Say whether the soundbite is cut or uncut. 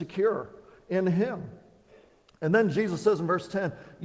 uncut